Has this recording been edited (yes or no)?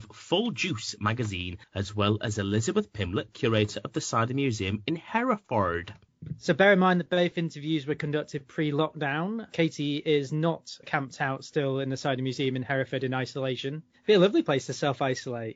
no